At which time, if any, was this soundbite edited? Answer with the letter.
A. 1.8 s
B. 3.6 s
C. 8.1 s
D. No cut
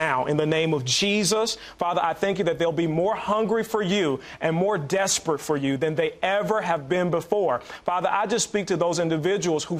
D